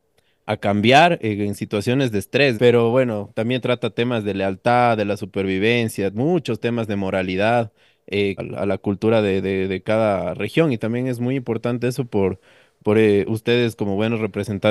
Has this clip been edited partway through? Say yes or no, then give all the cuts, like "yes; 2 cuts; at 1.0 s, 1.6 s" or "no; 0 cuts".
yes; 2 cuts; at 2.6 s, 8.4 s